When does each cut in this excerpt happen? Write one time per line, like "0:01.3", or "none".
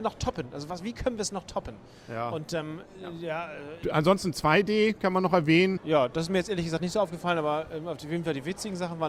0:03.8
0:05.8